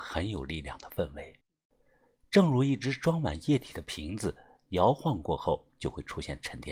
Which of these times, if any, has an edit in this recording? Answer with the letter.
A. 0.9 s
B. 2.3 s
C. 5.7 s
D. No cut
C